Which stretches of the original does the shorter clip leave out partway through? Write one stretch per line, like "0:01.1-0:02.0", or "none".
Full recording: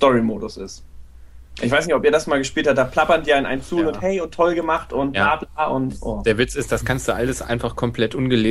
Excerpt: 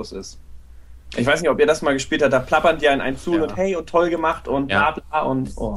none